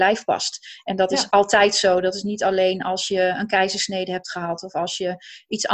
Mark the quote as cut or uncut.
uncut